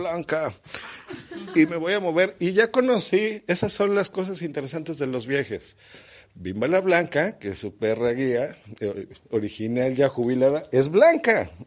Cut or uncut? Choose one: uncut